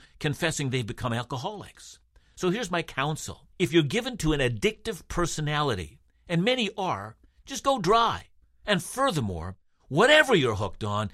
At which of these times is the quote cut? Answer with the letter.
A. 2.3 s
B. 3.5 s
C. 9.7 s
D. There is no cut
B